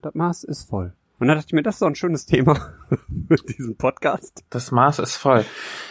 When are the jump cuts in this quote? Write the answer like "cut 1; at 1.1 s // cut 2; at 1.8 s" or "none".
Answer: none